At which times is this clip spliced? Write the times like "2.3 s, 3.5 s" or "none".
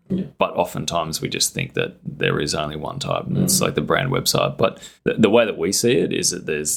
5.0 s